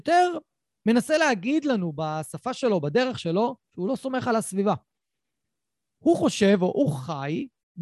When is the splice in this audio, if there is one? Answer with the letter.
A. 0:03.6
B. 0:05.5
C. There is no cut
A